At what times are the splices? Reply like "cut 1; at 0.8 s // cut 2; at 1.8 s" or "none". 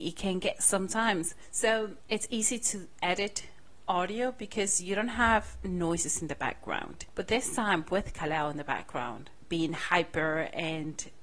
cut 1; at 2.1 s